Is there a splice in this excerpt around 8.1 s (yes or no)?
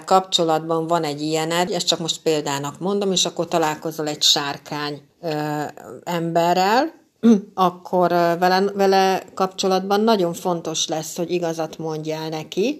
no